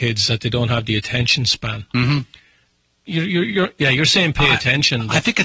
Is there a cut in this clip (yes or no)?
yes